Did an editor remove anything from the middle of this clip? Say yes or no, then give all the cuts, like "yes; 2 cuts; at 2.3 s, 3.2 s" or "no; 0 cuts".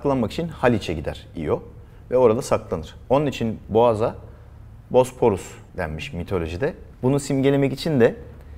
yes; 2 cuts; at 5.7 s, 6.9 s